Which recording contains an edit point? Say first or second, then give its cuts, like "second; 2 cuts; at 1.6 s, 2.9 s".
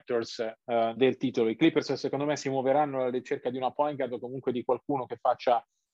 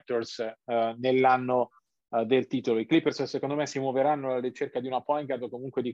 first; 1 cut; at 1.0 s